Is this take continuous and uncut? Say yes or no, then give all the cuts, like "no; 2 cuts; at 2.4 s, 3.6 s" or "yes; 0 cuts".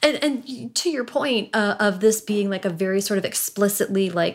yes; 0 cuts